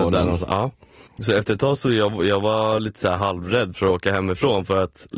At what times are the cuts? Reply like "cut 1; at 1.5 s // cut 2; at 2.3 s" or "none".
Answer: none